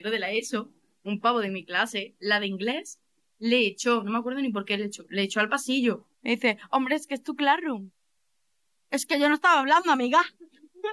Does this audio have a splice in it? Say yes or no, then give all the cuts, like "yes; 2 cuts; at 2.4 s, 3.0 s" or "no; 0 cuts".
yes; 1 cut; at 6.1 s